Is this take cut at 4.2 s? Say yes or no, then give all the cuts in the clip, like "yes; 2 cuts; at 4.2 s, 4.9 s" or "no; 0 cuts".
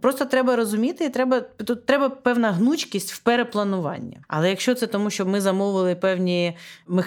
yes; 1 cut; at 4.2 s